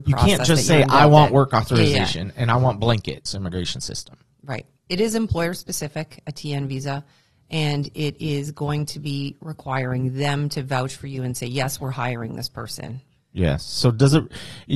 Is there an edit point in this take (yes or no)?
yes